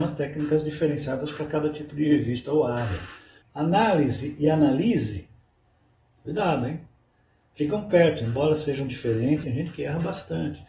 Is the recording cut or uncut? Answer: cut